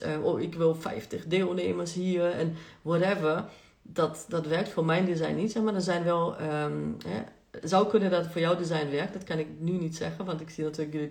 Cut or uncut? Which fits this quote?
uncut